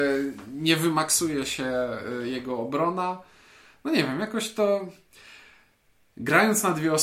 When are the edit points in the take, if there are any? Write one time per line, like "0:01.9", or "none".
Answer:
none